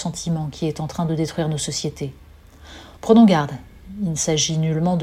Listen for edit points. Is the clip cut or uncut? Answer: cut